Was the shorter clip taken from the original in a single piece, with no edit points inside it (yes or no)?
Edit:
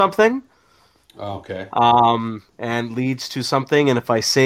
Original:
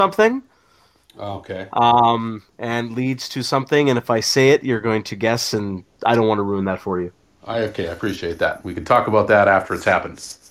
yes